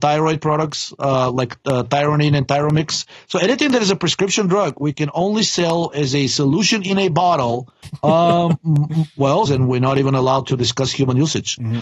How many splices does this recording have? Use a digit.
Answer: 2